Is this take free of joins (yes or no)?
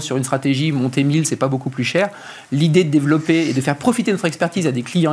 yes